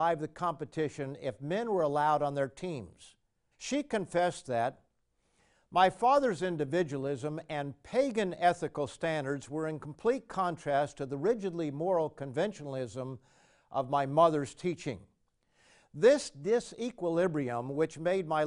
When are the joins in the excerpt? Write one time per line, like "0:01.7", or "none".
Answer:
0:03.5